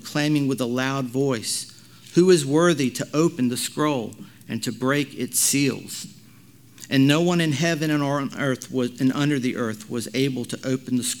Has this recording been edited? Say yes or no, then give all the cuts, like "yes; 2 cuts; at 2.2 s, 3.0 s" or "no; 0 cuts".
no; 0 cuts